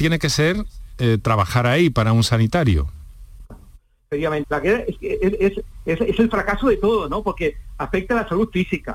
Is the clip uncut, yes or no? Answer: no